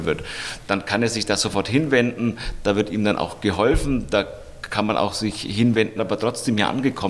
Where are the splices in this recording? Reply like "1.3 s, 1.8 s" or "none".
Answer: 6.0 s